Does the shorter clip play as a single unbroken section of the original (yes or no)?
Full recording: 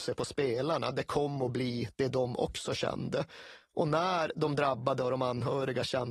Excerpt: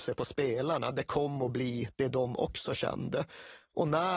yes